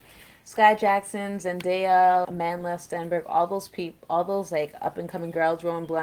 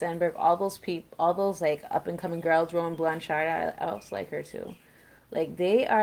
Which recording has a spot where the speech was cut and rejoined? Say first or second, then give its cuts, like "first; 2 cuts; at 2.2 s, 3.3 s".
first; 1 cut; at 2.2 s